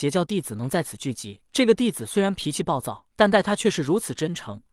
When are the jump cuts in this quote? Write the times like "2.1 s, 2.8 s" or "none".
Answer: 1.4 s, 3.1 s

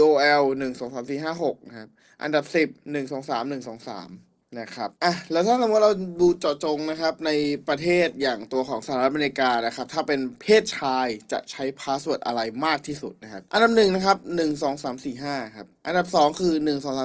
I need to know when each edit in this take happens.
4.9 s, 13.5 s

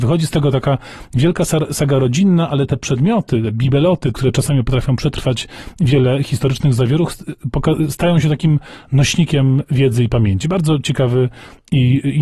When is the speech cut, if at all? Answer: 4.1 s

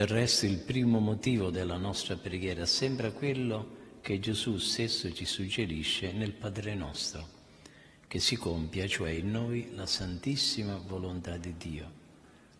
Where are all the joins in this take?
none

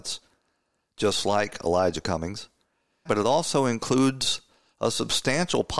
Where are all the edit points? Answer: 3.1 s

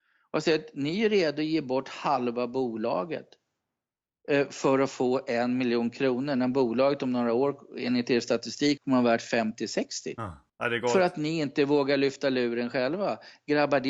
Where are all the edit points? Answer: 8.8 s, 10.5 s

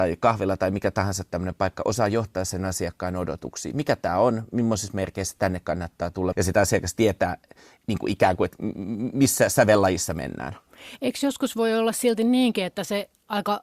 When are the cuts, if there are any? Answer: 6.3 s

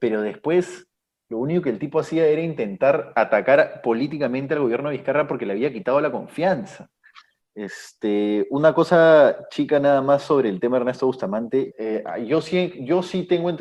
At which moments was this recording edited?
7.4 s, 11.7 s

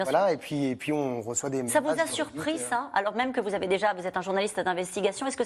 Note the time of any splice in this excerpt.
none

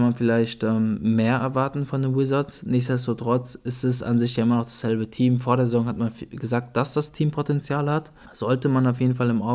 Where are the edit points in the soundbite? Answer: 8.2 s

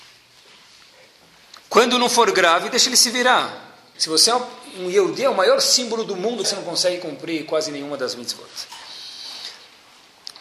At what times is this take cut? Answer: 3.9 s, 6.4 s

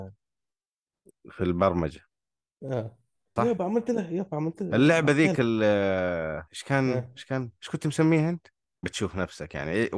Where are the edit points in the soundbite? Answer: 3.4 s, 6.5 s, 8.8 s

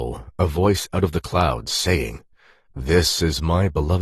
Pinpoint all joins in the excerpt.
none

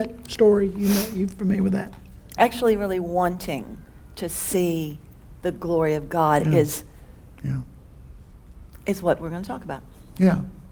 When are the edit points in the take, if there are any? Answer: 2.4 s

